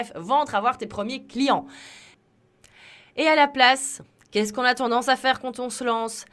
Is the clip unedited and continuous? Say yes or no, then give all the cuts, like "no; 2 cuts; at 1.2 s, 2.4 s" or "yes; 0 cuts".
yes; 0 cuts